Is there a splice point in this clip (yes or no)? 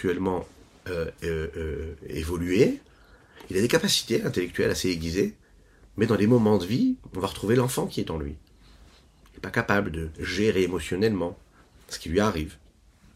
no